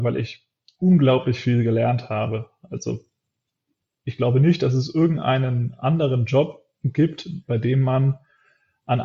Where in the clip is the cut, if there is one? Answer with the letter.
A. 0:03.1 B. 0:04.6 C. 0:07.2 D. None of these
D